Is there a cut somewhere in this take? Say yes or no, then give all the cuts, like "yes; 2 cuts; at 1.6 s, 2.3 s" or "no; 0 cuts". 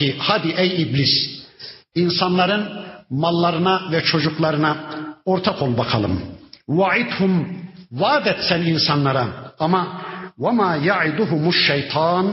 no; 0 cuts